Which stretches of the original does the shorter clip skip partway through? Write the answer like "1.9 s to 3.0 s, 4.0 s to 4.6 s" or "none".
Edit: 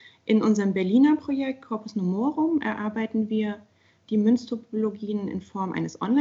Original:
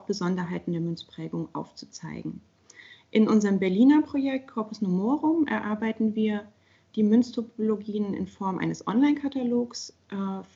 none